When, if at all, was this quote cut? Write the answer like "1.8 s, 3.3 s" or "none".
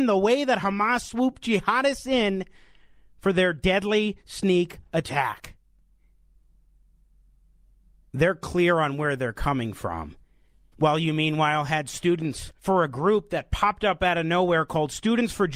10.7 s, 12.6 s